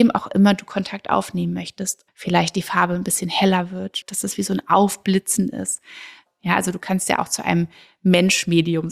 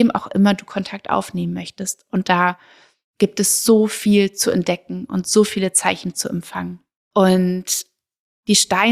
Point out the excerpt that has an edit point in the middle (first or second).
first